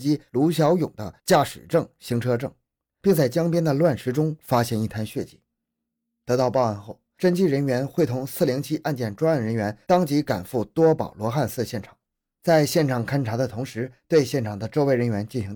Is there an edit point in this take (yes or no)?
no